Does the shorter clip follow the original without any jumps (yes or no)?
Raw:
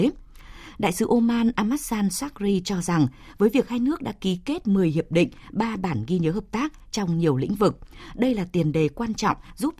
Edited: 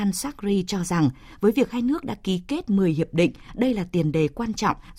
no